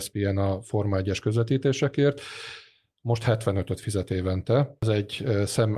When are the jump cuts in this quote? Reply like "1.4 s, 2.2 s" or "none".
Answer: none